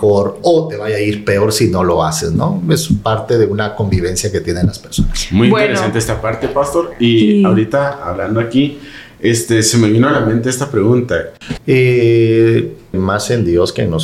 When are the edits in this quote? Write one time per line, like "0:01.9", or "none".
0:11.6
0:12.9

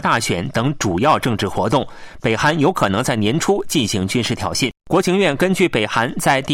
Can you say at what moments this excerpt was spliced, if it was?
0:04.8

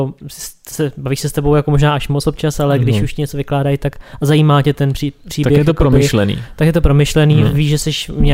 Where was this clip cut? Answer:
none

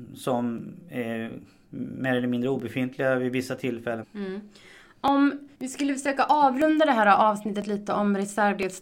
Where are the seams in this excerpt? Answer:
0:04.0
0:05.5

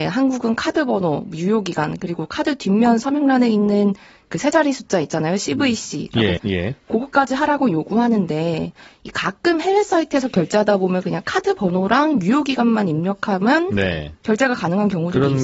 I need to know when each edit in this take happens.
0:06.4

